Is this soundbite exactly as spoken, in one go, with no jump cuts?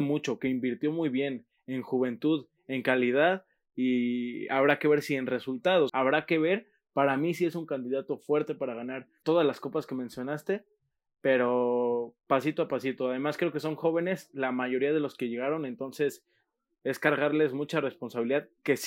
no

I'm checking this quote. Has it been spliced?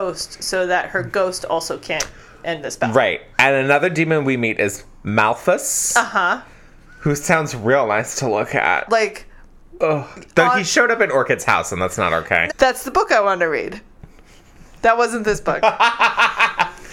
yes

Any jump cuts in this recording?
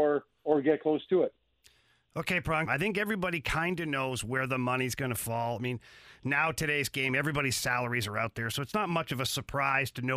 yes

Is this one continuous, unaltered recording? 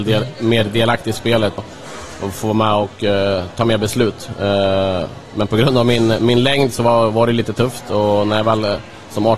no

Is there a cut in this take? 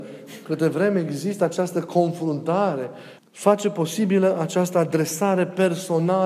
yes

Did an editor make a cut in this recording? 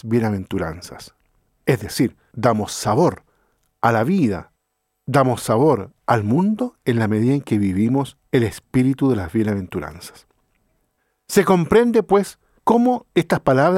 no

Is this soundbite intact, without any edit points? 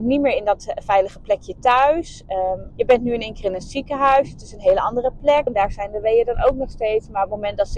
no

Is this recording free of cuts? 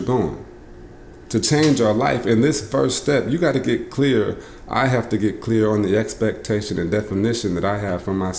no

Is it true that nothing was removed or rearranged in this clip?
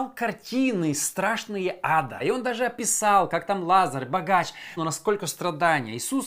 no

